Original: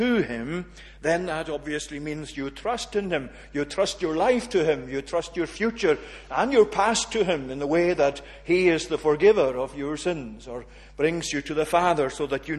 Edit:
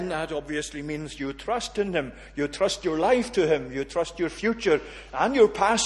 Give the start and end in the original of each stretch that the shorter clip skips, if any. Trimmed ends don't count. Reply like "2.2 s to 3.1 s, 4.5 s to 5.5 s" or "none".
none